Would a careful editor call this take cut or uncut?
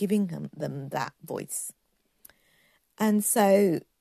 uncut